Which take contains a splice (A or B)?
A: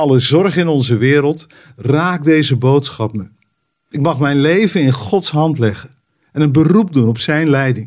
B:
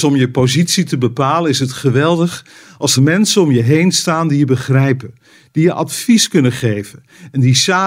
B